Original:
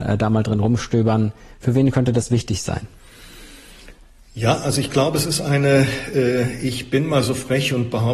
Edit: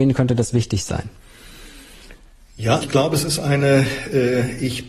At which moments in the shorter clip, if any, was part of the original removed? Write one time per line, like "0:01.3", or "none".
0:02.8